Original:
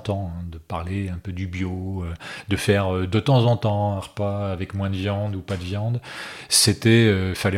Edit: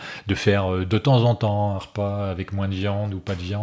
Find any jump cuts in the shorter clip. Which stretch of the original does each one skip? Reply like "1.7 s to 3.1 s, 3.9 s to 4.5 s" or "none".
none